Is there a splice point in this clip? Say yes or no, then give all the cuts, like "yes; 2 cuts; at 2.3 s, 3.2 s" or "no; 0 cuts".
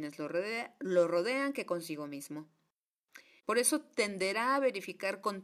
yes; 1 cut; at 3.4 s